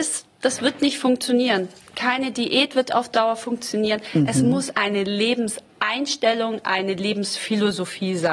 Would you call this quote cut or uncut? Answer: uncut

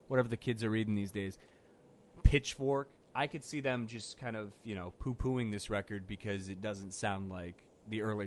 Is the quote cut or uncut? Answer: uncut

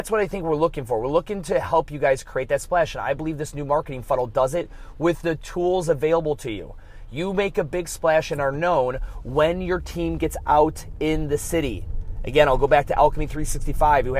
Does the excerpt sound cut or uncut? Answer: uncut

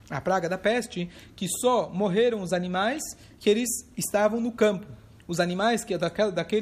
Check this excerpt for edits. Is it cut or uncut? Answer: uncut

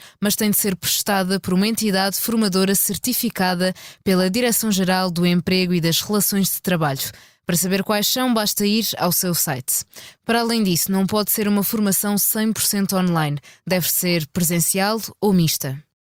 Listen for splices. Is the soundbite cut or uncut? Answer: uncut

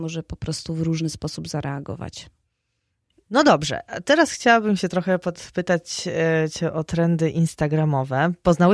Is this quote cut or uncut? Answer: uncut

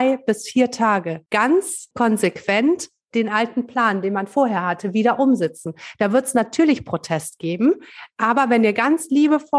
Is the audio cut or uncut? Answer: uncut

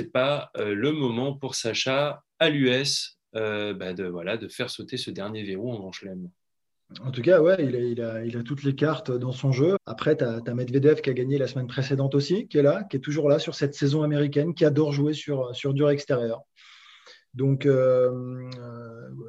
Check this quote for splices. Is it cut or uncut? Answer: cut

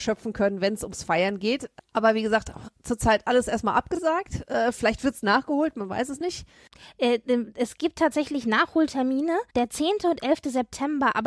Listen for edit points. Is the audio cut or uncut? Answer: cut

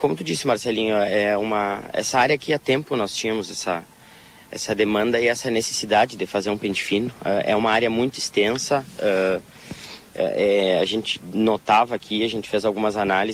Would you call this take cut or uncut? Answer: uncut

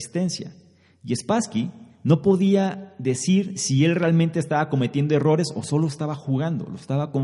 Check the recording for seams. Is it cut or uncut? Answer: uncut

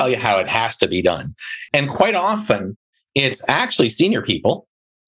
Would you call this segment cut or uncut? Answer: uncut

